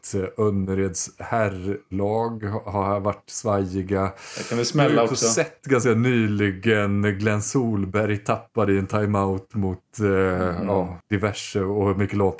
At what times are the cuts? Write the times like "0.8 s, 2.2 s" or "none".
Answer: 11.0 s

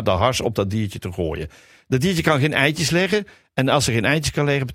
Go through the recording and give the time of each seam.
none

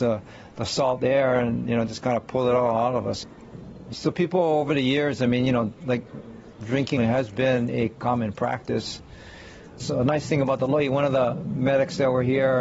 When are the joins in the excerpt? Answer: 7.0 s

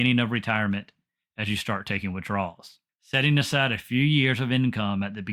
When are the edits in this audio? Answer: 2.9 s

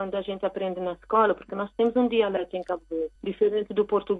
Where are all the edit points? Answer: 3.2 s

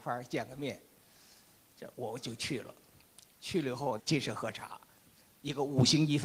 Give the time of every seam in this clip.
4.0 s

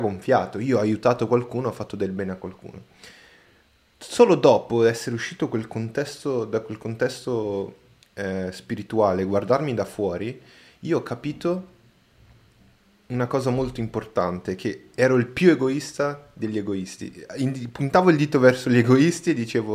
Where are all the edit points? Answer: none

